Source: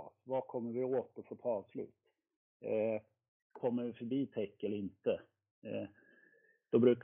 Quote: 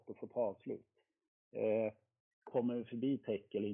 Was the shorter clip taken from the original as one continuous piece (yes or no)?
yes